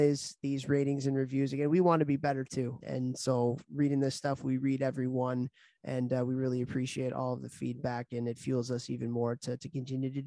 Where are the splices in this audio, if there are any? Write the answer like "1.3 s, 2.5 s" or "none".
2.8 s